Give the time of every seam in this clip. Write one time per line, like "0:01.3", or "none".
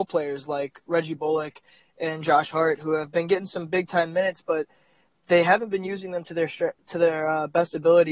none